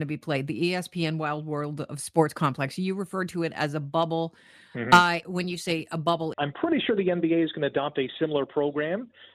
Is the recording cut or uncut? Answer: cut